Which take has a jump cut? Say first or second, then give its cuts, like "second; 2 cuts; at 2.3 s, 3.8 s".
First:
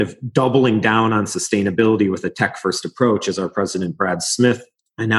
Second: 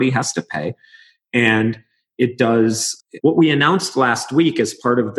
second; 1 cut; at 3.2 s